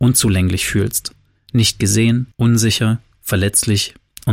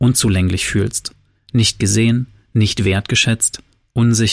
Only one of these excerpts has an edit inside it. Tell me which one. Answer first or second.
first